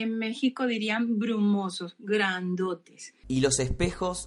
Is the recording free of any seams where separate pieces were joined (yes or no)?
no